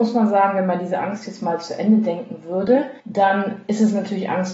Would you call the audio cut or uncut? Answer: cut